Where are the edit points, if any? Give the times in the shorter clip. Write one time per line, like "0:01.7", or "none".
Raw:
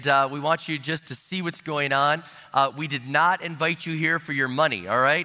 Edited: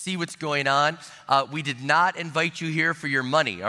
none